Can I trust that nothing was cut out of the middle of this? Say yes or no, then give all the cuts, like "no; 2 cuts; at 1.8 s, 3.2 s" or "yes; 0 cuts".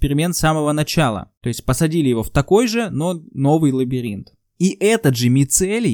no; 1 cut; at 1.4 s